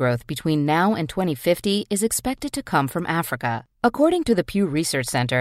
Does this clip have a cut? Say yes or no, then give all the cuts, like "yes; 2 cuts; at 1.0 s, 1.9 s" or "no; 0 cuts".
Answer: yes; 1 cut; at 3.7 s